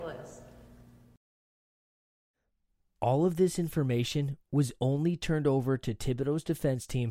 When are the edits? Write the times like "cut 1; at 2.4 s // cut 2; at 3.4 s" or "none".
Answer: cut 1; at 4.4 s